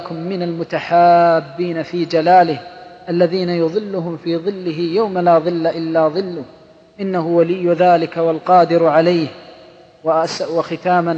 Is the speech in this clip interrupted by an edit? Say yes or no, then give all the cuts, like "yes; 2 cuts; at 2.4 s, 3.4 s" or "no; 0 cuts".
no; 0 cuts